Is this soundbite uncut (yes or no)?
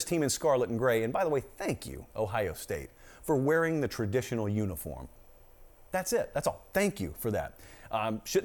yes